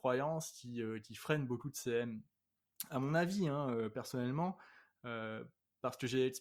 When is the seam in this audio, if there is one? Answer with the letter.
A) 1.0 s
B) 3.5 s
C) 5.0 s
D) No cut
D